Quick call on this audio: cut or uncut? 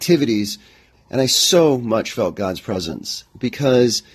cut